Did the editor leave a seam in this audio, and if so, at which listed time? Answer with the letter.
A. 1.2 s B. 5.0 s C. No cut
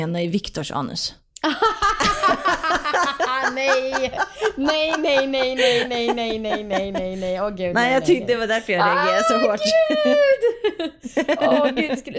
B